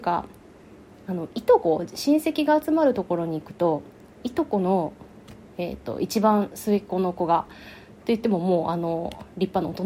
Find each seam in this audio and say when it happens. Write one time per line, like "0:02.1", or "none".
none